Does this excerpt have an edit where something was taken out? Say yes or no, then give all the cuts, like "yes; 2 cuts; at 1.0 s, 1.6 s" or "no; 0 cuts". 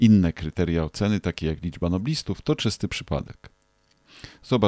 no; 0 cuts